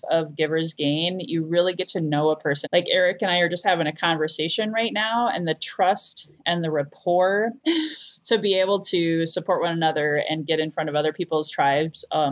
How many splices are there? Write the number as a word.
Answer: two